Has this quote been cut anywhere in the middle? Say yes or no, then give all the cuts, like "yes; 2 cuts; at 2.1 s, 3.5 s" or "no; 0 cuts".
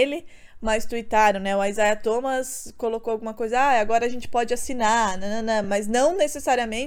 no; 0 cuts